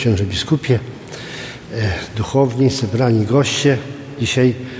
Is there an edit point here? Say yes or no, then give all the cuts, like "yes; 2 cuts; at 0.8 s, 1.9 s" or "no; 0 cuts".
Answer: no; 0 cuts